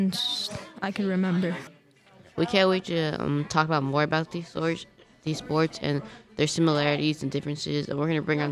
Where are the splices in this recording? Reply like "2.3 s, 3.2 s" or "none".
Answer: none